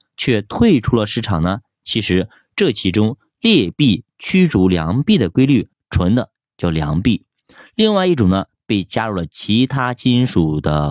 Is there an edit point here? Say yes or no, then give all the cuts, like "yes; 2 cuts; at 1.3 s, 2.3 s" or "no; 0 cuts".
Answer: yes; 1 cut; at 5.7 s